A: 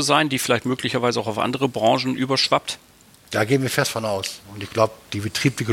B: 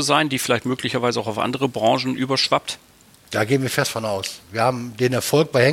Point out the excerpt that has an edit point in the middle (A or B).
A